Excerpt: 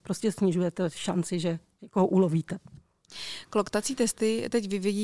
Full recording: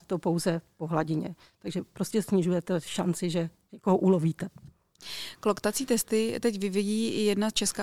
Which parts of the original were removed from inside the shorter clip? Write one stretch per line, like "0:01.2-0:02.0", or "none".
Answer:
none